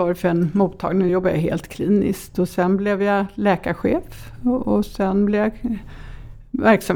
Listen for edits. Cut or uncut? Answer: uncut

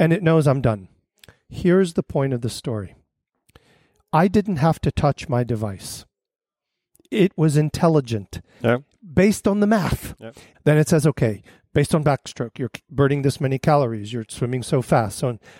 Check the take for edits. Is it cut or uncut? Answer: cut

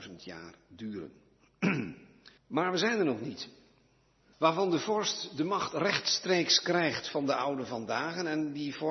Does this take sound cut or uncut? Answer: cut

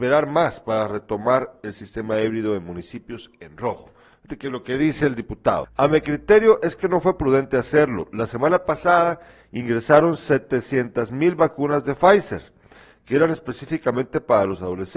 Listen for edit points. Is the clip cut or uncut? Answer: cut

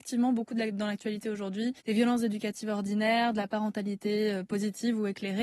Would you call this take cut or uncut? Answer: cut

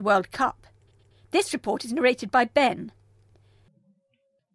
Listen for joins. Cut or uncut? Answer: uncut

